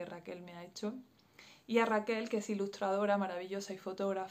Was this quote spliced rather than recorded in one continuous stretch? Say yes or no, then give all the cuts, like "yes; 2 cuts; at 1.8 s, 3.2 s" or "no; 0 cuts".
no; 0 cuts